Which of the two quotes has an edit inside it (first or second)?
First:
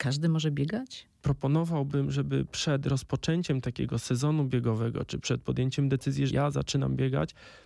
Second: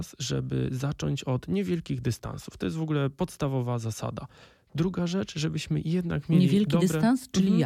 first